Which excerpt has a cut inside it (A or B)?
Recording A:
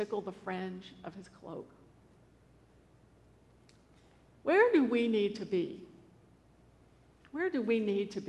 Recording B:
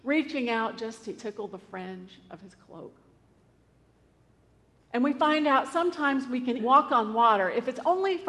B